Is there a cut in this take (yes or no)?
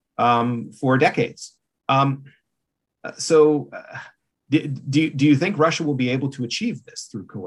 no